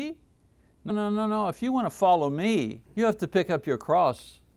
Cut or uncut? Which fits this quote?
cut